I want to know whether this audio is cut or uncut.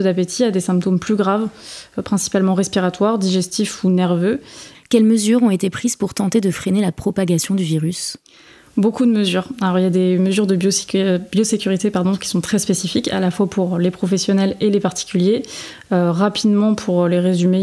cut